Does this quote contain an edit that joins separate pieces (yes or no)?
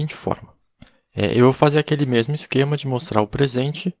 no